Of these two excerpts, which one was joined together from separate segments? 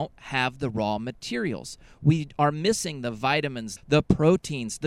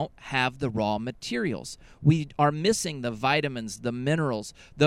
first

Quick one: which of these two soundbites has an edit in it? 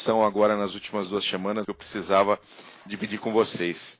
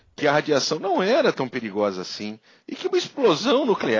first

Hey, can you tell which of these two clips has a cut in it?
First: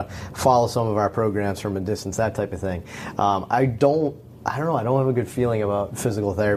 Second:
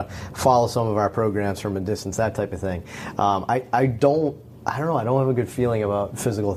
first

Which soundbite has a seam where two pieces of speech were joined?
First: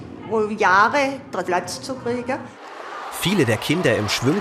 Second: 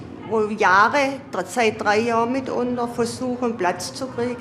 first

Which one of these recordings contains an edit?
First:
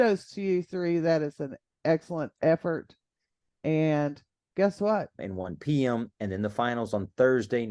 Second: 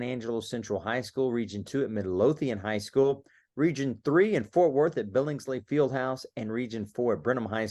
first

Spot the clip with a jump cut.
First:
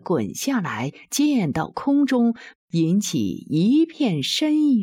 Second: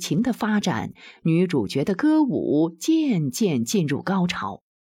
first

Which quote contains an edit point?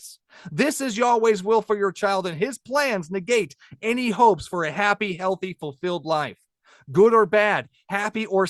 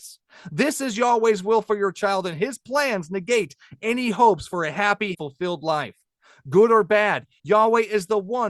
second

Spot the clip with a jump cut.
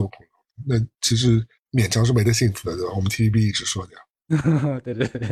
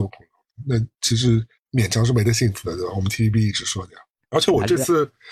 second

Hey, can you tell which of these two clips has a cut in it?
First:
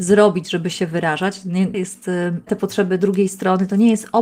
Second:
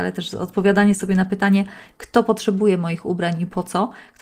first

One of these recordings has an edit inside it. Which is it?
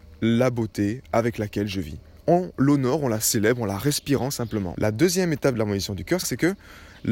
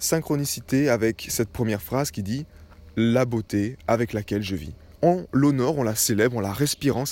first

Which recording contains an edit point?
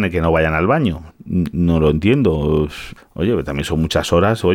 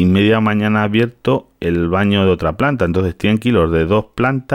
first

